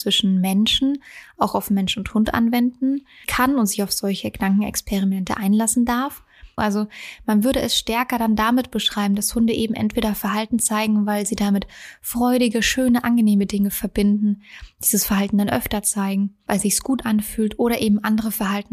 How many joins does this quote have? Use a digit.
2